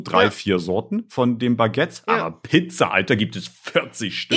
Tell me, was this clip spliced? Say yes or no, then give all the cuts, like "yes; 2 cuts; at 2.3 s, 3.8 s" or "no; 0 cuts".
no; 0 cuts